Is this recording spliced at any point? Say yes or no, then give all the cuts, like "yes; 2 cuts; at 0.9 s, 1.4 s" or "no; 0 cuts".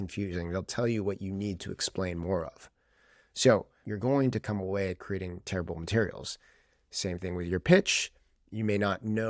yes; 1 cut; at 3.8 s